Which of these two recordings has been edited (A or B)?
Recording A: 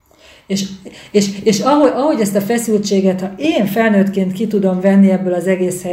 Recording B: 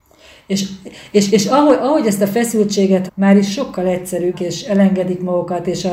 B